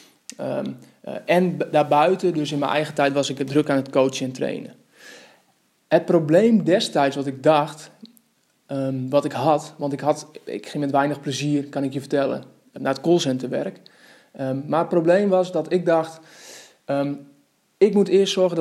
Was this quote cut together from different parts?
yes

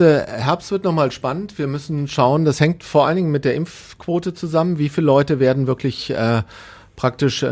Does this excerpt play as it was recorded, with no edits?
yes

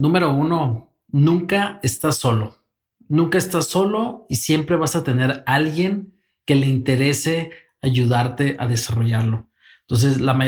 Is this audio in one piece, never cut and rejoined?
yes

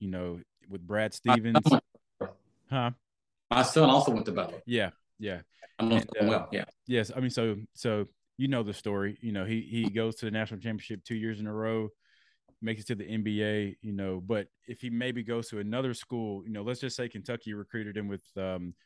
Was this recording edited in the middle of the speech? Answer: no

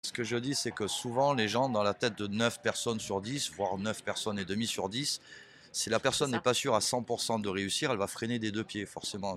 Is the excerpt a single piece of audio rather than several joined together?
yes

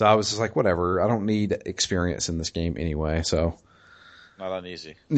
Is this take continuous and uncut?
yes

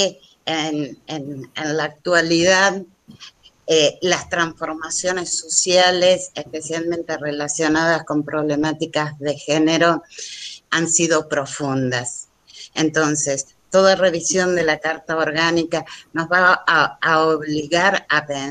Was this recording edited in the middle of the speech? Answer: yes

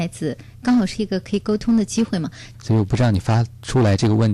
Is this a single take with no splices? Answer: no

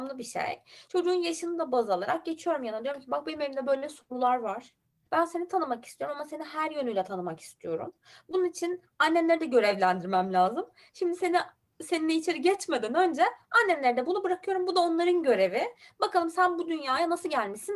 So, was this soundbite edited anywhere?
no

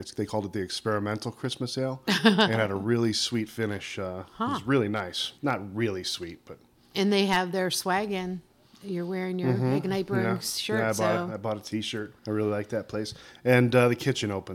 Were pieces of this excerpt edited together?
yes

